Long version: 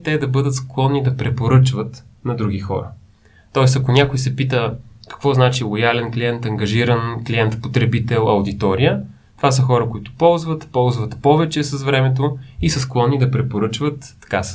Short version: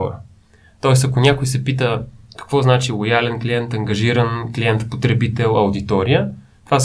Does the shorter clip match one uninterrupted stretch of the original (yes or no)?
yes